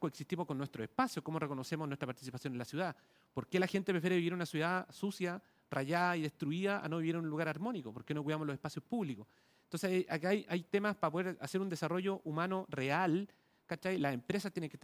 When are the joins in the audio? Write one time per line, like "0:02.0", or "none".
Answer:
0:13.6